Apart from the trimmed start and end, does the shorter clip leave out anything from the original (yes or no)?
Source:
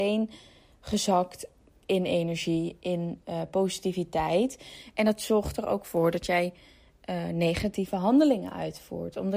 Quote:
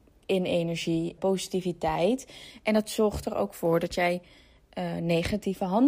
yes